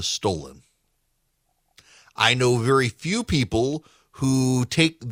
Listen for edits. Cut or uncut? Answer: uncut